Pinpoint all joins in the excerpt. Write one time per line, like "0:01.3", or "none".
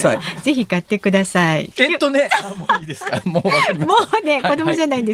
0:01.7